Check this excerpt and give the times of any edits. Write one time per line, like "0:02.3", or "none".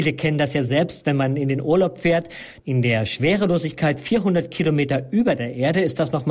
0:02.6